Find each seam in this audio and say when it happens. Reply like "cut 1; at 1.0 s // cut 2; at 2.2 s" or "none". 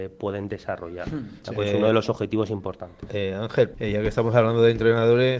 cut 1; at 3.7 s